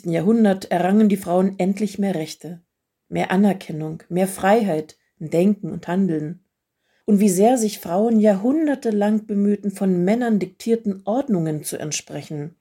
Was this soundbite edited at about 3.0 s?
no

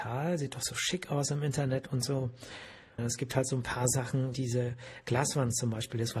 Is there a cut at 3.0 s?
yes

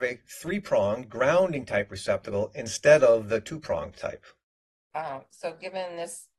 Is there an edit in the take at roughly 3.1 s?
no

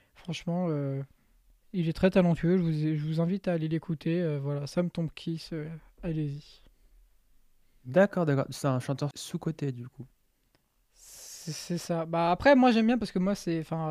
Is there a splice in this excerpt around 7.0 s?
no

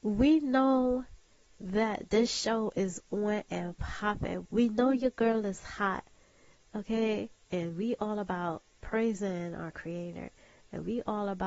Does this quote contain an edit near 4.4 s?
yes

